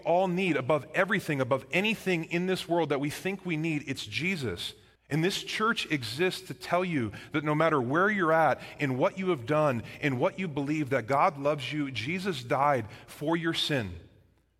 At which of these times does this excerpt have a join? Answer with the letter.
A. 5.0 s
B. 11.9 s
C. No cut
A